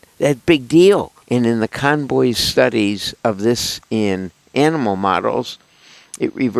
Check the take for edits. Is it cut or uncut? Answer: cut